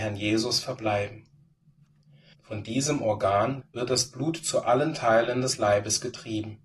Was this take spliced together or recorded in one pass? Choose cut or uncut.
cut